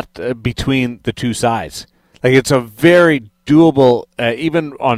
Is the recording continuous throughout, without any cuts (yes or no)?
yes